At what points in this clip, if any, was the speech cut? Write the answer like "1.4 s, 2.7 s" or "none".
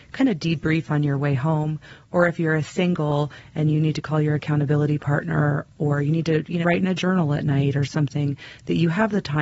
6.6 s